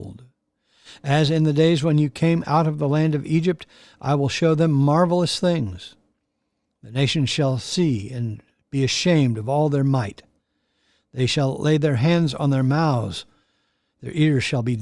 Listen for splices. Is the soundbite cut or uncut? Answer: uncut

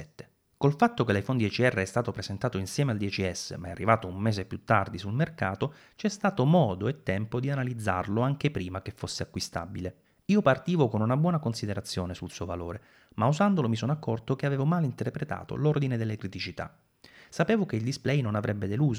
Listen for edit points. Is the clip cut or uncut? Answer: uncut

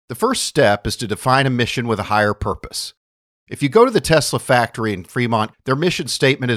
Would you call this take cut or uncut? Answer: cut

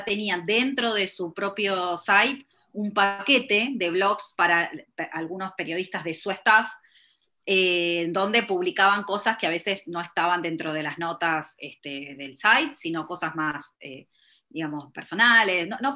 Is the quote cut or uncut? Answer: uncut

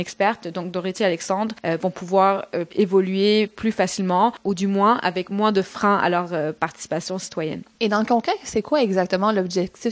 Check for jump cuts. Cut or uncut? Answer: uncut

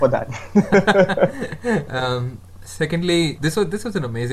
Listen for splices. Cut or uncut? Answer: cut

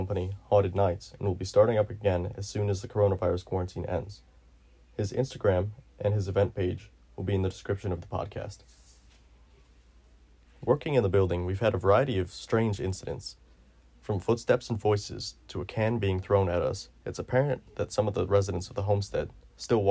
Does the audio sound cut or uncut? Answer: uncut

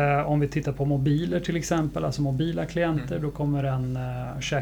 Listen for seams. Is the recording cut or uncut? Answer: uncut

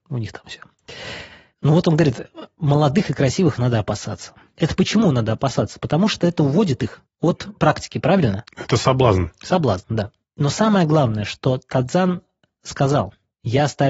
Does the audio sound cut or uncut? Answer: uncut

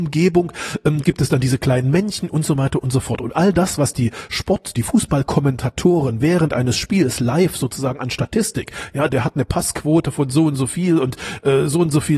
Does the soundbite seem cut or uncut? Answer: cut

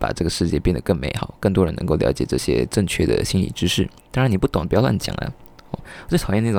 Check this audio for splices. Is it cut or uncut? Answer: uncut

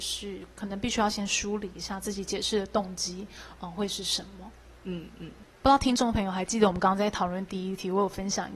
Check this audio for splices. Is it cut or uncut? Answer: uncut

